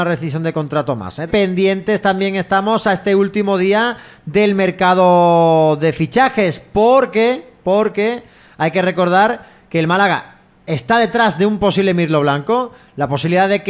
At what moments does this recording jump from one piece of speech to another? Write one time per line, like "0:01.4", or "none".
0:01.3